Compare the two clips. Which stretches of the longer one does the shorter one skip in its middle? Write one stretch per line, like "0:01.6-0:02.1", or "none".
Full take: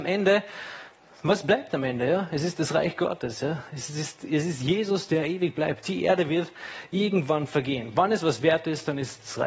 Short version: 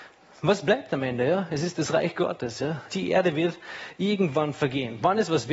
0:03.7-0:05.8